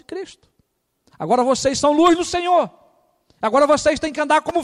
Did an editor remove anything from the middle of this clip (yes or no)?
no